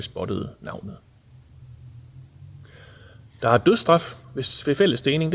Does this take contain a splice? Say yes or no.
no